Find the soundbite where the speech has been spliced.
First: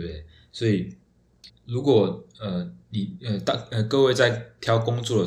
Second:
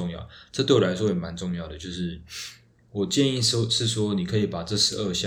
first; 2 cuts; at 1.5 s, 2.8 s

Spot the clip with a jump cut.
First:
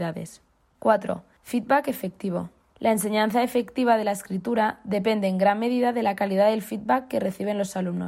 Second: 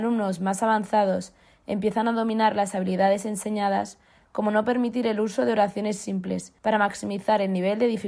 second; 2 cuts; at 4.3 s, 6.6 s

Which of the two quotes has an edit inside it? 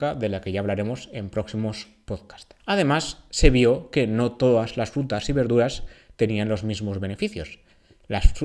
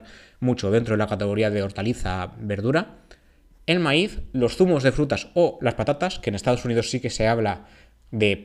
first; 1 cut; at 2.6 s

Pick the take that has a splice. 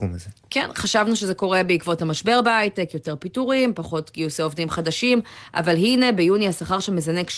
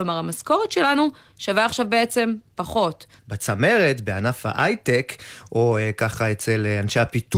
second; 1 cut; at 3.2 s

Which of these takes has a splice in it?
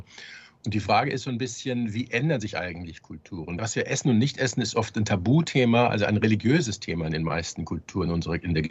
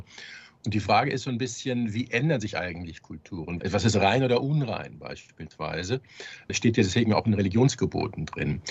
second; 1 cut; at 3.6 s

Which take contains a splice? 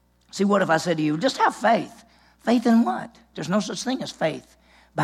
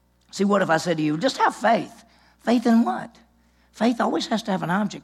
first; 1 cut; at 3.3 s

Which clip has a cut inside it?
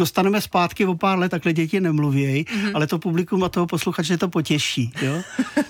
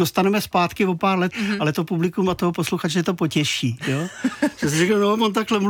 second; 1 cut; at 1.3 s

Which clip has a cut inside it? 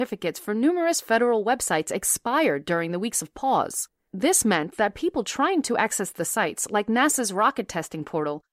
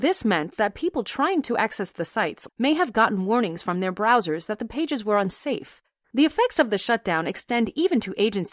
second; 2 cuts; at 2.5 s, 6.0 s

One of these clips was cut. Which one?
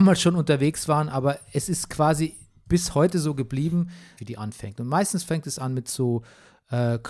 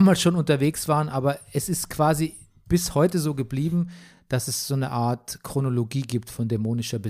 first; 1 cut; at 4.2 s

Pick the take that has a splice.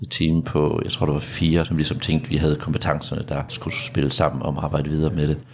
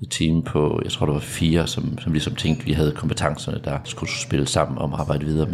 first; 1 cut; at 1.6 s

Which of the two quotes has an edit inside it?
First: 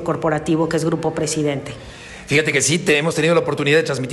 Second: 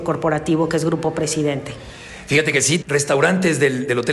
second; 1 cut; at 2.8 s

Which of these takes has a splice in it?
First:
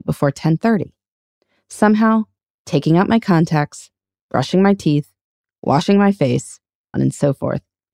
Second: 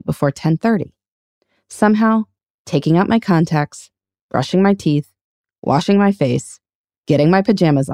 first; 1 cut; at 6.9 s

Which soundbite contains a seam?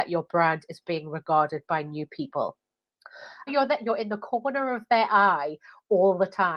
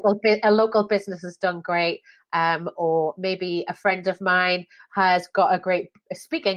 first; 1 cut; at 3.5 s

